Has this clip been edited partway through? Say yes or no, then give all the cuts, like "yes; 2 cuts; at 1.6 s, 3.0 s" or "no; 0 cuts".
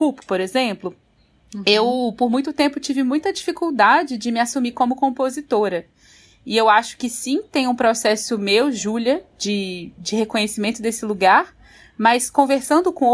no; 0 cuts